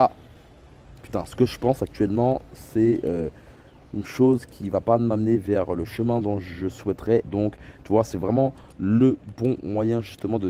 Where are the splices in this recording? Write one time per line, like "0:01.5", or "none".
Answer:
0:07.2

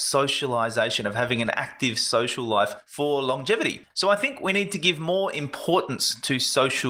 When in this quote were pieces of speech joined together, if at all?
0:03.9

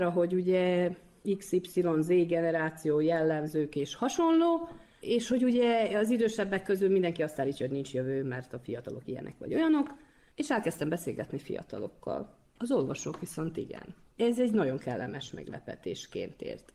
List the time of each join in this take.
0:12.6
0:14.1

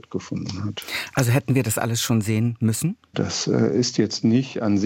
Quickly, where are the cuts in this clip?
0:03.1

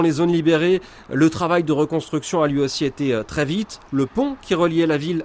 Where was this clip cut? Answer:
0:03.9

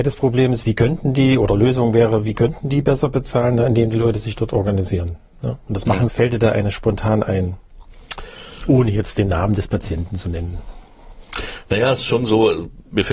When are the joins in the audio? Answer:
0:06.1

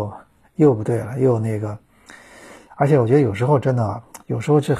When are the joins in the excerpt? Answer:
none

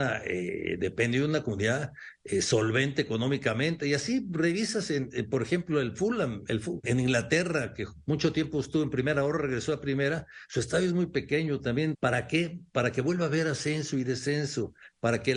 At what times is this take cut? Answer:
0:06.8
0:11.9

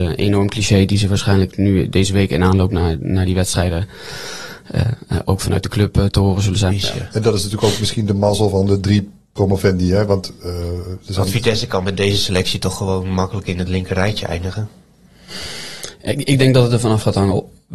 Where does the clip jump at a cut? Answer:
0:06.7

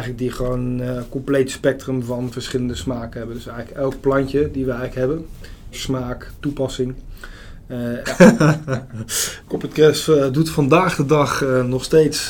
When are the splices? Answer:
0:05.7
0:08.0
0:09.4

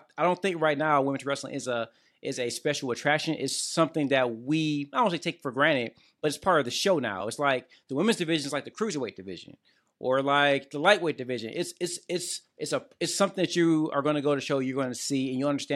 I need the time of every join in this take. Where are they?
none

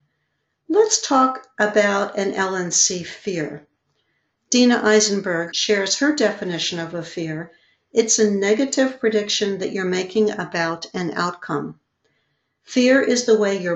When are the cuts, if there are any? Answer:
0:05.5

